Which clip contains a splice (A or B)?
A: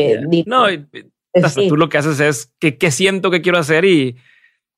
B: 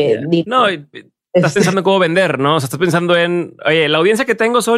A